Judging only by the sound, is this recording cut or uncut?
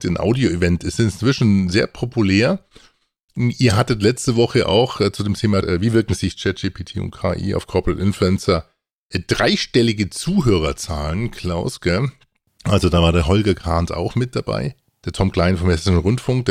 uncut